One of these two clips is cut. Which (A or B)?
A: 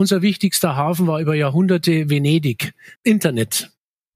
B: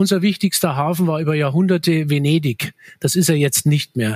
A